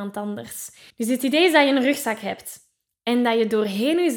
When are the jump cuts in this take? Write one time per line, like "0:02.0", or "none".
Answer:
0:00.9